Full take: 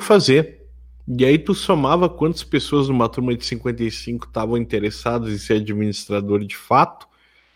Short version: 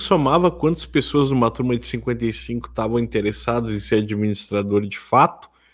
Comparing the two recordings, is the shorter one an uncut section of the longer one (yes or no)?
yes